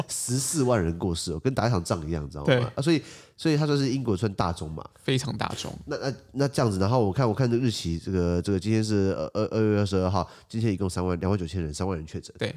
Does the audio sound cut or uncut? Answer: uncut